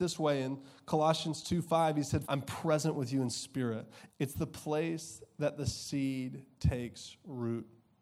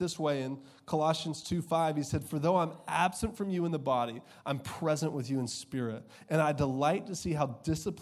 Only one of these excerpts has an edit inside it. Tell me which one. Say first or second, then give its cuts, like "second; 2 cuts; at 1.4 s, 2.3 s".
first; 2 cuts; at 2.2 s, 4.1 s